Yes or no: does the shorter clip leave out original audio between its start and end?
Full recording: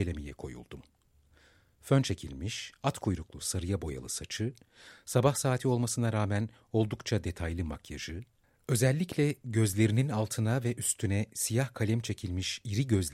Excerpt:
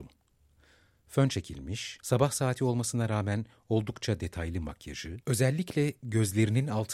yes